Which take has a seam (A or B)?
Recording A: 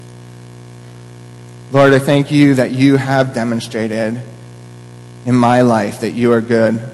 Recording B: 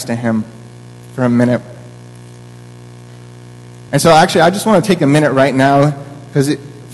B